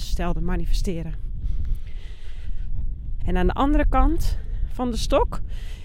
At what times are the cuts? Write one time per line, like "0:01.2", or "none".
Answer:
0:03.2